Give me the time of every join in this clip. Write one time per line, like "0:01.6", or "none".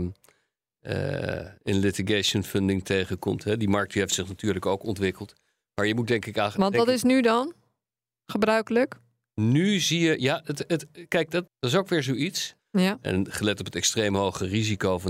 0:11.5
0:12.6